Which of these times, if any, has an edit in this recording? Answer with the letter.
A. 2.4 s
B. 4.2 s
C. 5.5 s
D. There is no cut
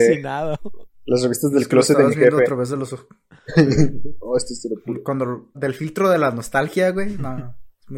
C